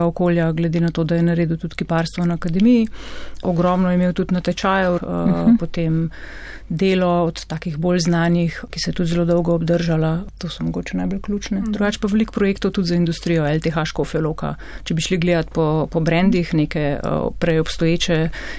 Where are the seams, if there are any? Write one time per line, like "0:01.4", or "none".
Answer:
0:05.0
0:08.7